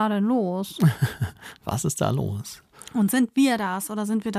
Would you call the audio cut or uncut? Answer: uncut